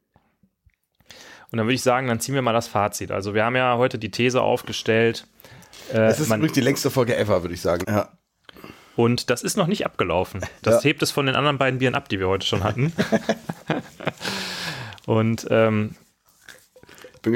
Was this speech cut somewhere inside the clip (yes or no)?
yes